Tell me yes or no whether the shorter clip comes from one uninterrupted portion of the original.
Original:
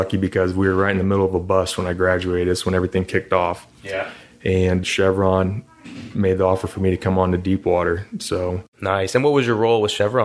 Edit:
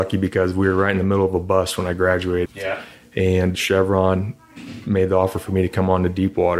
no